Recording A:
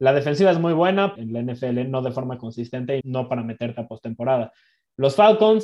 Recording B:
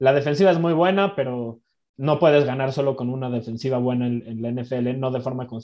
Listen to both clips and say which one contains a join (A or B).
A